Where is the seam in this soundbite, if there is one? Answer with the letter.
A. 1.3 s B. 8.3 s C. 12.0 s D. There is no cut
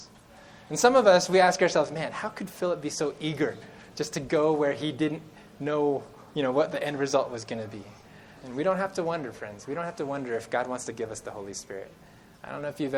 B